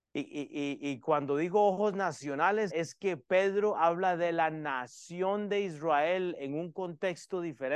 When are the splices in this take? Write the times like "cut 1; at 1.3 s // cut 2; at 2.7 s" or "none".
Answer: cut 1; at 2.7 s